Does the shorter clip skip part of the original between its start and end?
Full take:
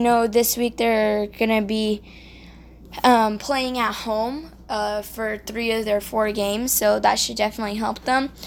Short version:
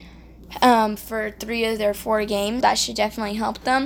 yes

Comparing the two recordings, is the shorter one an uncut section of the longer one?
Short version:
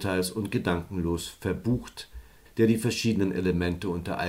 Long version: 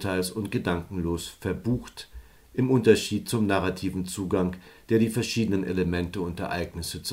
no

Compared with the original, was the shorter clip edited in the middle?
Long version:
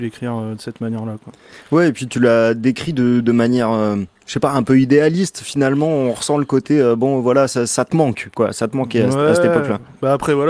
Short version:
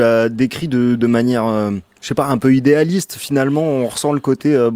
no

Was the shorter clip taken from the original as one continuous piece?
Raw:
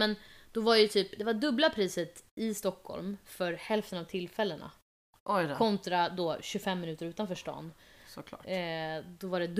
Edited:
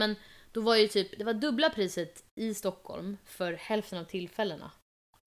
yes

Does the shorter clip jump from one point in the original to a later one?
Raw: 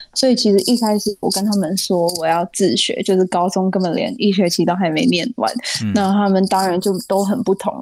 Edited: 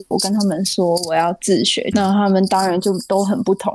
yes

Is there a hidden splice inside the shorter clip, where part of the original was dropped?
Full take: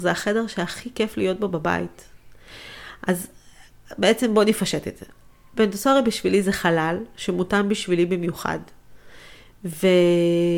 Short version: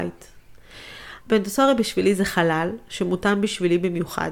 yes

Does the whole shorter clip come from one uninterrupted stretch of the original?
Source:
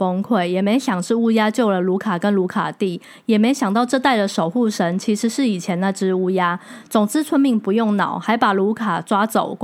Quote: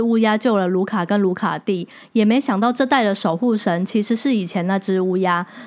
yes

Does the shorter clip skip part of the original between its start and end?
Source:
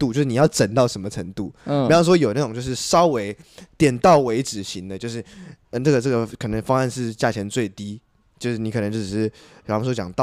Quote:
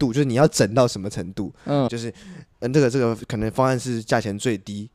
yes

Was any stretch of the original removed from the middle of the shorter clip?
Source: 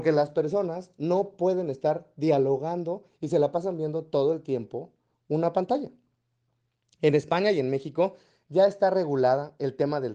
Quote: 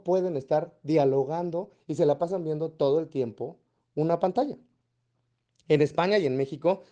no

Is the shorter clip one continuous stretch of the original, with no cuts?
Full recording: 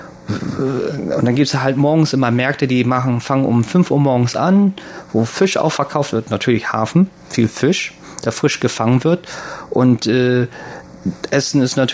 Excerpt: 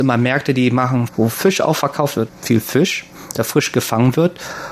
no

